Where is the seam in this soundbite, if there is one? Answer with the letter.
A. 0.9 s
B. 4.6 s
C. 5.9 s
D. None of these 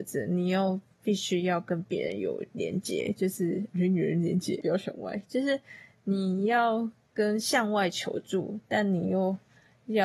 B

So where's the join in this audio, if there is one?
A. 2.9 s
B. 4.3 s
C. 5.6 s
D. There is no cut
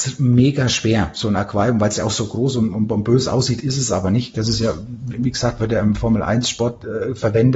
B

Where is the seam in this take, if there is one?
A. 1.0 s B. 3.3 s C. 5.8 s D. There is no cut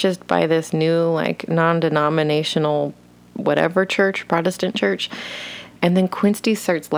C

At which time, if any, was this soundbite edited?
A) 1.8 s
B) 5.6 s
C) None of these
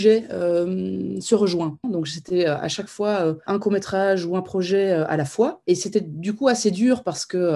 A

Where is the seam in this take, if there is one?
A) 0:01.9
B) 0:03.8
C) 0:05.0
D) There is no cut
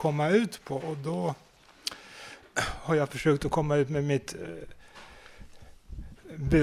D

